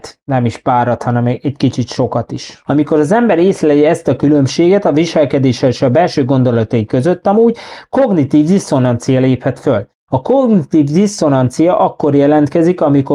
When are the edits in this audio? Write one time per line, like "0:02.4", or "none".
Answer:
0:02.7
0:10.1